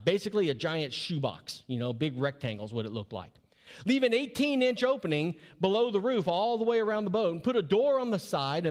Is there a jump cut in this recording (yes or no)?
no